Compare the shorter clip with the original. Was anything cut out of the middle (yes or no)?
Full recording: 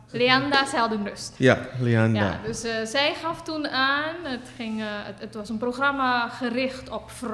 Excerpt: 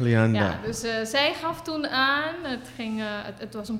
no